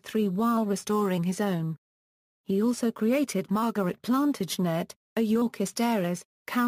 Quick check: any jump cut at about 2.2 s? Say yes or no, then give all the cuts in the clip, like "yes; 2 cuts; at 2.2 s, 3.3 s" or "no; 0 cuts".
yes; 1 cut; at 2.2 s